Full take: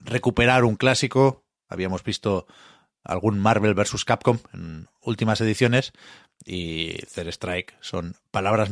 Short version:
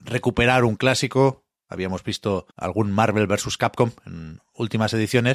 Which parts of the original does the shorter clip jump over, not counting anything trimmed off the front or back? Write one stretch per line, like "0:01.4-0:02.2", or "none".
0:02.5-0:03.0